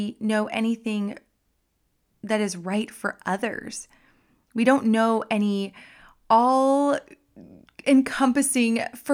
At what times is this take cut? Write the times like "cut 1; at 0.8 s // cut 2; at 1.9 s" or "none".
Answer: none